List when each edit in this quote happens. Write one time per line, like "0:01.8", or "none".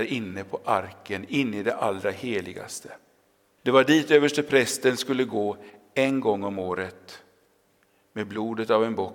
0:03.6